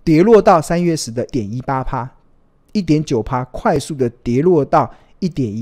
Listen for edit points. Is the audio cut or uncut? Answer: cut